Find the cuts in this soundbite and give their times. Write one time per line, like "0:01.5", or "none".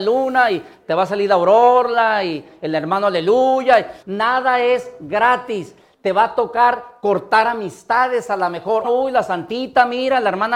0:04.0
0:08.8